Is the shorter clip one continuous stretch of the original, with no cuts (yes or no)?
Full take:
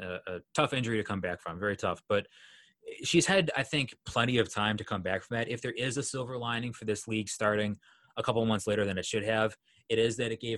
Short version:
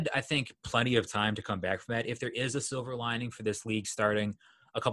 yes